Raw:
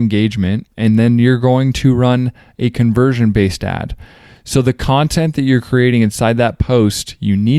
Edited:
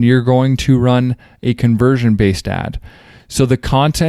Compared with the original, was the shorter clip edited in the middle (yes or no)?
no